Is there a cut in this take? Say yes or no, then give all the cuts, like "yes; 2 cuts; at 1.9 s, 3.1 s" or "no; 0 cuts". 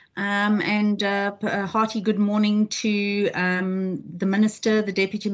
no; 0 cuts